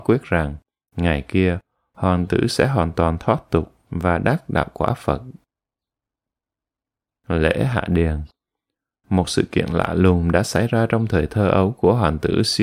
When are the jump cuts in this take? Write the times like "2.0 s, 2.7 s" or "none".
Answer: none